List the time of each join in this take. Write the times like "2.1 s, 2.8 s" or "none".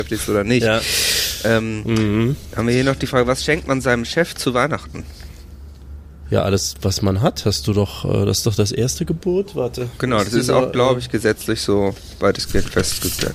none